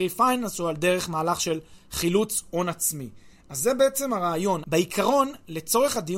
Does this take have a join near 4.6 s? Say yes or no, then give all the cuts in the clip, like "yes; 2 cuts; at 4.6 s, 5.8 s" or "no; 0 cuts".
yes; 1 cut; at 4.6 s